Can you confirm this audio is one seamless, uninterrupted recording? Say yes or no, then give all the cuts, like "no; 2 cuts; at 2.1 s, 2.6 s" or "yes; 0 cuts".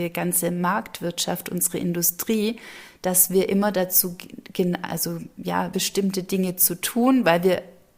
no; 1 cut; at 5.7 s